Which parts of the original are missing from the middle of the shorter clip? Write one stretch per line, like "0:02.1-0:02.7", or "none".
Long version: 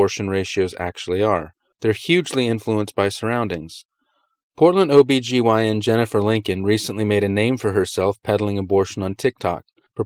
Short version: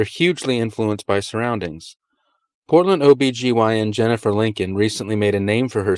none